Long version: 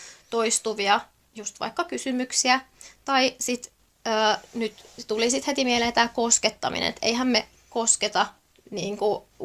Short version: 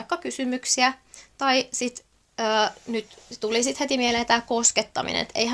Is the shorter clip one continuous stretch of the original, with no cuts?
yes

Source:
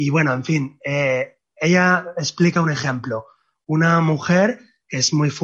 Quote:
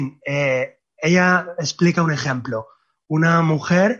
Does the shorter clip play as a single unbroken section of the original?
yes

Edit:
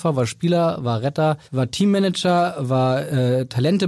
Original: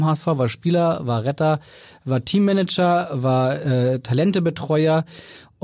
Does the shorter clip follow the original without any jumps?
no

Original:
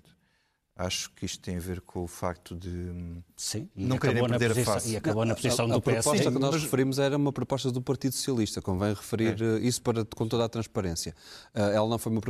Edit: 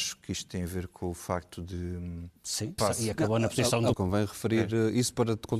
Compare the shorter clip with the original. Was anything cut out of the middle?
yes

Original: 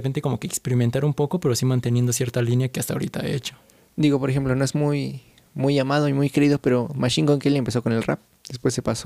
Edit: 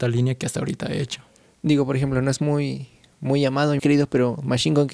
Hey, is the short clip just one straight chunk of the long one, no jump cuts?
no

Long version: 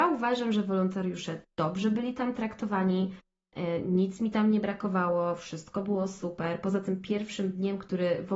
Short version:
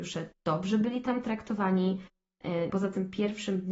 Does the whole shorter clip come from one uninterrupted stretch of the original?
no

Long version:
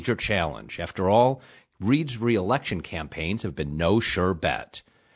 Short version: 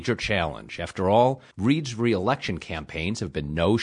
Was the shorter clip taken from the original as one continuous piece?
no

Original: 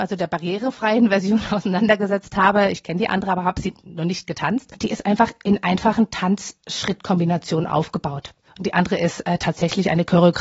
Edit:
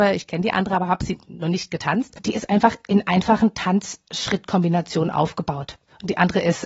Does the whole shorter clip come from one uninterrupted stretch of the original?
yes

